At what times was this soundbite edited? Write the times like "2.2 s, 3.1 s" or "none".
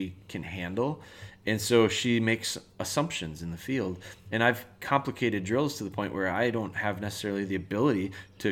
none